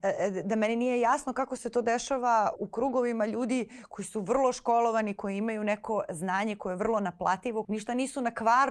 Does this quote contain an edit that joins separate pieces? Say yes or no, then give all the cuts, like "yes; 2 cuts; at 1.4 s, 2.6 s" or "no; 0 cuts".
yes; 2 cuts; at 2.6 s, 7.6 s